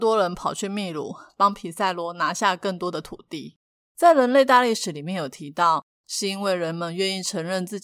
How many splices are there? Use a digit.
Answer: 1